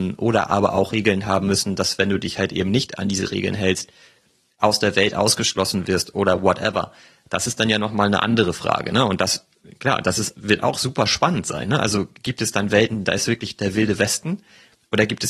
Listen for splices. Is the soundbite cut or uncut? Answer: uncut